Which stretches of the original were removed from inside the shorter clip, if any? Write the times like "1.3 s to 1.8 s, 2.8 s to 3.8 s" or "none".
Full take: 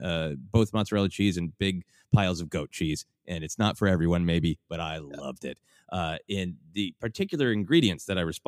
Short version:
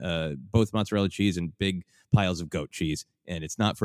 none

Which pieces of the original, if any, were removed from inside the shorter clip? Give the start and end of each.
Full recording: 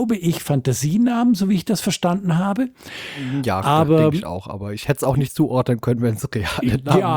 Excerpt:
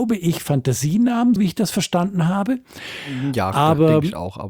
1.4 s to 1.5 s

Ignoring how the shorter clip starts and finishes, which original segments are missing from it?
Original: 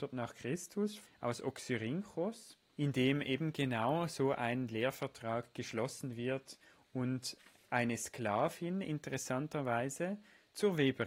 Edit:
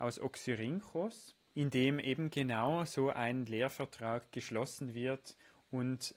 none

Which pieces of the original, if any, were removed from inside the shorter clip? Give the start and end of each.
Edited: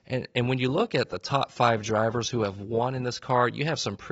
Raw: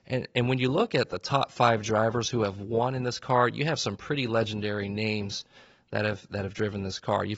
none

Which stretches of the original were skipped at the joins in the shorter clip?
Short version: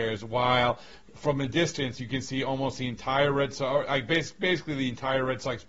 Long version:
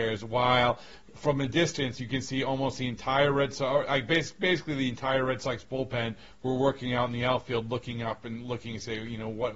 none

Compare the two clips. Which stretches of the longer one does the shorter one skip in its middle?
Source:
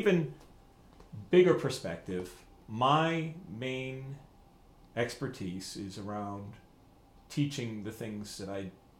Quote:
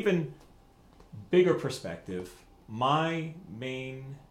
none

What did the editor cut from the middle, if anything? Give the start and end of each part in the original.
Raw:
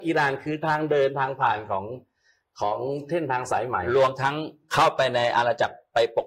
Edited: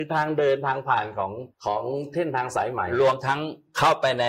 2.1 s to 2.5 s

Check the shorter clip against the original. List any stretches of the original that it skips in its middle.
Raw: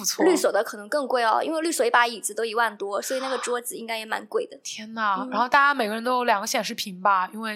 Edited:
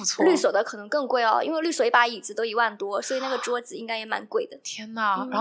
none

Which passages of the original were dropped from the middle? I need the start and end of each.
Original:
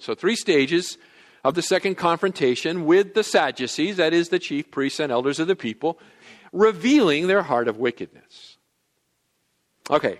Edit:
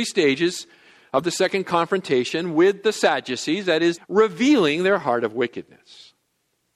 4.3 s to 6.4 s

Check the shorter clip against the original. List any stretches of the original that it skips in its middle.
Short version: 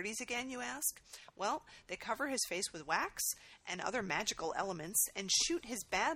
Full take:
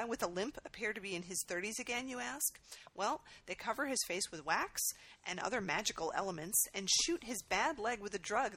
none

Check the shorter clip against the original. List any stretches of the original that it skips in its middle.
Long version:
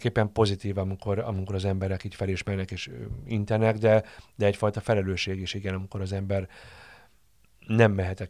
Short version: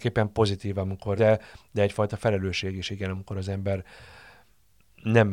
1.2 s to 3.8 s

